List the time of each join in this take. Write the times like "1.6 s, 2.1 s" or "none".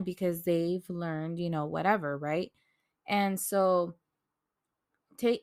none